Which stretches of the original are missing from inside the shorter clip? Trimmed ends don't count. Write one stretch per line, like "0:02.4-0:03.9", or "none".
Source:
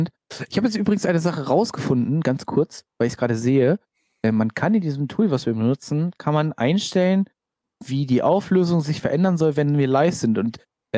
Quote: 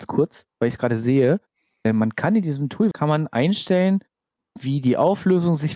0:05.3-0:06.2